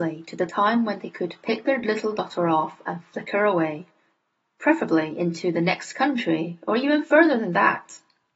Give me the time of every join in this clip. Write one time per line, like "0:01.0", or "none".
none